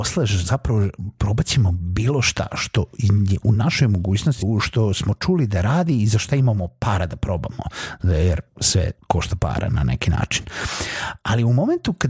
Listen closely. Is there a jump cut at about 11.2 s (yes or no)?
no